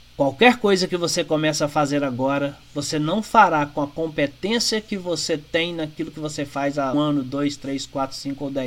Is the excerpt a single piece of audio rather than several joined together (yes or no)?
no